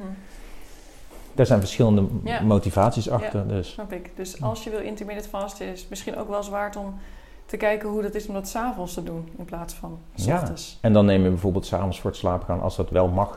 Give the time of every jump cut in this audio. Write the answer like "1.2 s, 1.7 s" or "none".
none